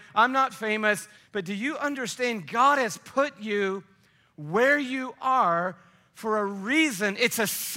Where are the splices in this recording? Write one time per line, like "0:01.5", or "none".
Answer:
0:01.2